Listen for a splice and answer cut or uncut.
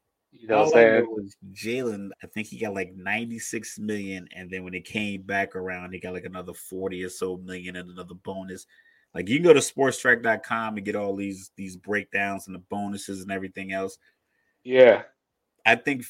cut